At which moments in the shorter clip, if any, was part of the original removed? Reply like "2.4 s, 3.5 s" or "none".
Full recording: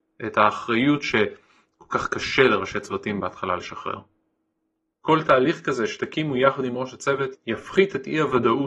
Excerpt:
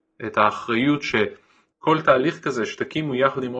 1.7 s